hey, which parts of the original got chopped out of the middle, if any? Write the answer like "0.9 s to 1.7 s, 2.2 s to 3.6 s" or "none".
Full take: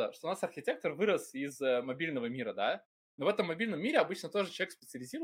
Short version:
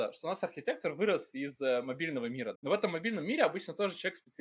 2.5 s to 3.1 s